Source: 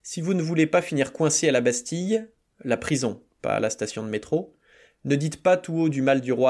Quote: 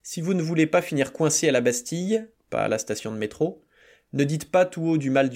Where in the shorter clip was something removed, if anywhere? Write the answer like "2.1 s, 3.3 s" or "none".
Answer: 2.4 s